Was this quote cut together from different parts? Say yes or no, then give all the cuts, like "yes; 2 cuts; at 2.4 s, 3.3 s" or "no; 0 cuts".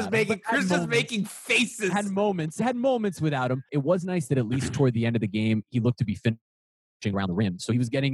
yes; 2 cuts; at 3.7 s, 7.1 s